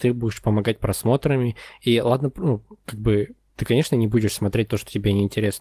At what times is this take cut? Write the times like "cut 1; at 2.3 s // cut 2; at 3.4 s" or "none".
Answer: none